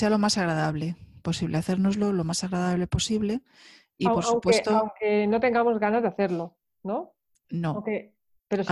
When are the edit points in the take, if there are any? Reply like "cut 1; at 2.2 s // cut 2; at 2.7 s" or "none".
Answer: none